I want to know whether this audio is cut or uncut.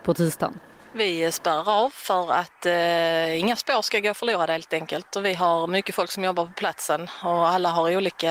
uncut